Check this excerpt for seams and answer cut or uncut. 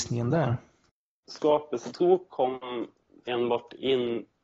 cut